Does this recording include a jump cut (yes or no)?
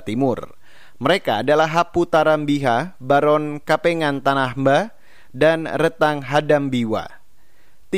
no